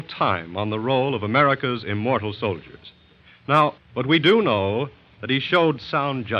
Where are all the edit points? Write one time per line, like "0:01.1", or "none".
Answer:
0:03.8